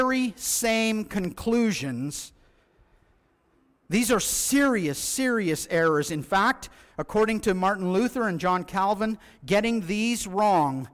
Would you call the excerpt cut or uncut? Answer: uncut